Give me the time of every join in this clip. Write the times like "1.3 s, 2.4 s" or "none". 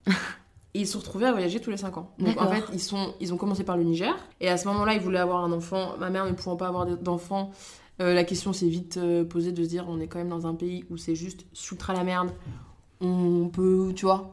4.3 s